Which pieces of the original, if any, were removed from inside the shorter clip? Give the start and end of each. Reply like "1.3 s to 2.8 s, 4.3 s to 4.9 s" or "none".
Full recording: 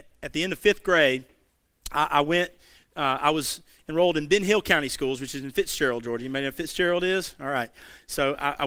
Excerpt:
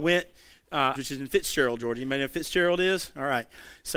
3.2 s to 5.2 s